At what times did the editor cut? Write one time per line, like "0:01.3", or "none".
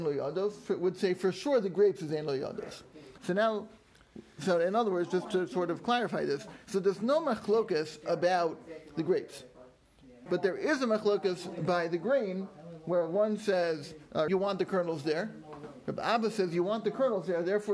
0:03.2
0:10.3
0:14.3